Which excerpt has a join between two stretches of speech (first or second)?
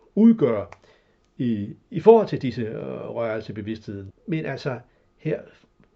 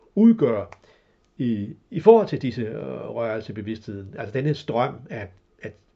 first